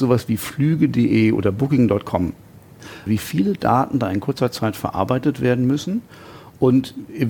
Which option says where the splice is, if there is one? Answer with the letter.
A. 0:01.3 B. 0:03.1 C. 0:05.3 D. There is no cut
B